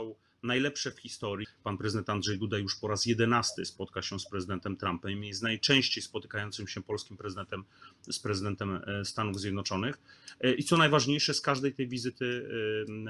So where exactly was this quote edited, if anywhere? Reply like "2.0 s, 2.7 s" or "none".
1.4 s